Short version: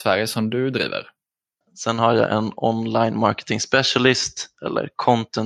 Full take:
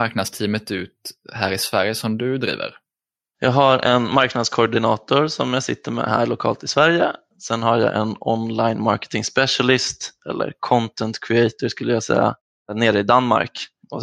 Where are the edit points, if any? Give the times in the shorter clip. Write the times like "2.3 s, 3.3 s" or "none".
1.6 s

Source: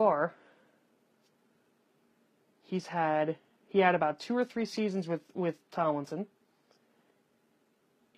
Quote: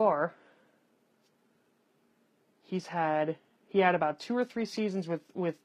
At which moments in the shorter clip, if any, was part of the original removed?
none

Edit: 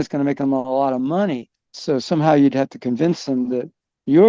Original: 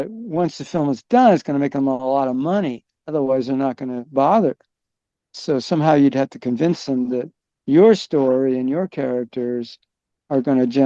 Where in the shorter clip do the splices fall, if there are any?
1.7 s

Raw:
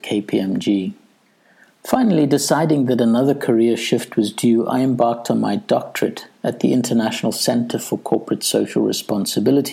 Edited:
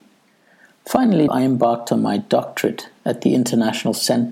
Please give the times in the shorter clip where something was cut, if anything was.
1.3 s

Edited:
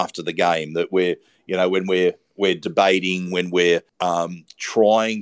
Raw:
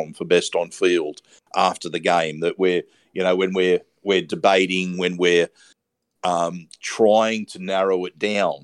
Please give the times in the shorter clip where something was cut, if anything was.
3.9 s

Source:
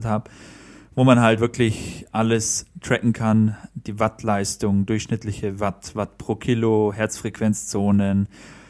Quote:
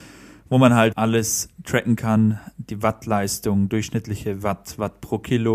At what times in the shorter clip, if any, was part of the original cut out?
0.9 s

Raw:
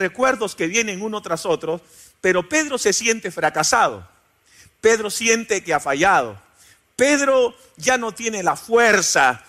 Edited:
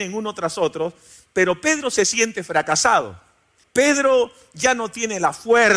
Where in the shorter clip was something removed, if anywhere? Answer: 3.6 s

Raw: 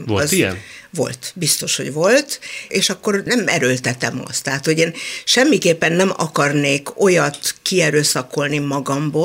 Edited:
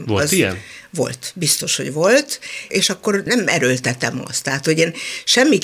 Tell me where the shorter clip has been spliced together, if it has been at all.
none

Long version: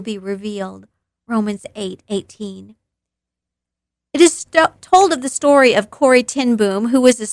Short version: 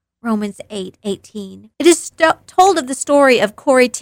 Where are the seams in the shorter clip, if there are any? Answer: 1.7 s

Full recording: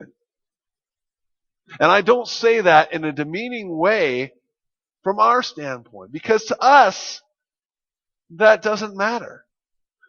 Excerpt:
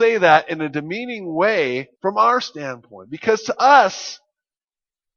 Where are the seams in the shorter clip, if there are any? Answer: 1.9 s

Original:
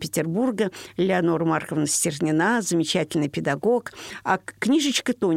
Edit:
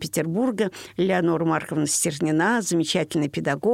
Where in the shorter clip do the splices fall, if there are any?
none

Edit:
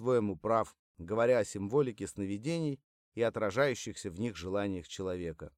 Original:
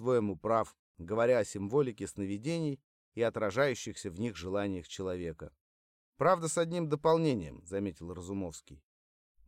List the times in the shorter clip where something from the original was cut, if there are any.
none

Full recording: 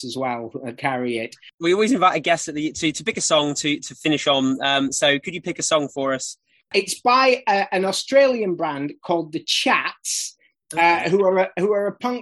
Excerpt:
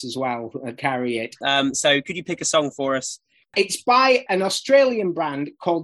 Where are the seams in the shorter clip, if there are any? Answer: 1.4 s, 4.3 s

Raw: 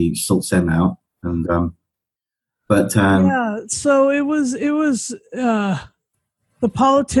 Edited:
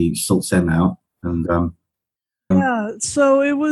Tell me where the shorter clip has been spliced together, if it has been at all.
2.5 s

